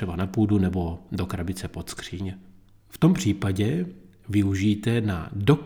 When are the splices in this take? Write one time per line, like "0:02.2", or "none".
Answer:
0:02.8